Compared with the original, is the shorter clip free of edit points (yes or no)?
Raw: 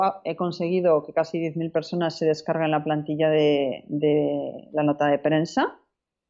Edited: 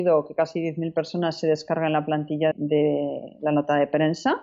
no